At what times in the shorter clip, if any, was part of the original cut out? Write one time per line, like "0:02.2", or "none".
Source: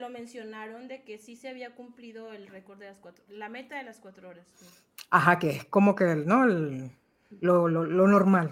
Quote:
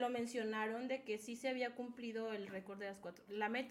none